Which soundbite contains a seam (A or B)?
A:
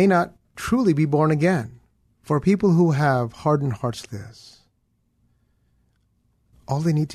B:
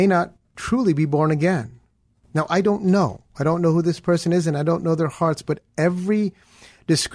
A